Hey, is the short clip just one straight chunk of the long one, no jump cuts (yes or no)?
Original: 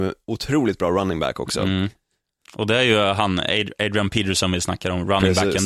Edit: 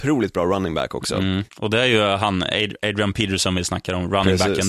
no